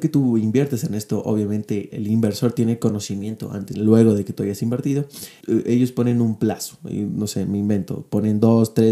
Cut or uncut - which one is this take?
cut